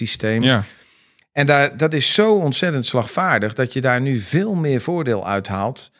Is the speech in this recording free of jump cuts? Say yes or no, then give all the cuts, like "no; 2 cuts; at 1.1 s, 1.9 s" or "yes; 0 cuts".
yes; 0 cuts